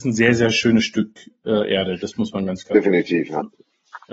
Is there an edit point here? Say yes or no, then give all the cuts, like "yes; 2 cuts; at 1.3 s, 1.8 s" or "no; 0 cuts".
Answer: no; 0 cuts